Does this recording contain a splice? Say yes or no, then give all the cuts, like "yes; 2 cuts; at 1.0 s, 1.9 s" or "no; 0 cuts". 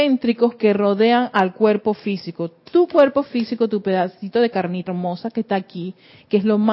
yes; 1 cut; at 4.9 s